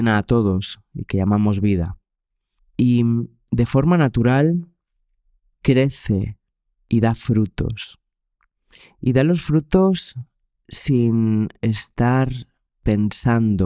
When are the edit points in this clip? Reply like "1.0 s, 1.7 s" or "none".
2.6 s, 5.5 s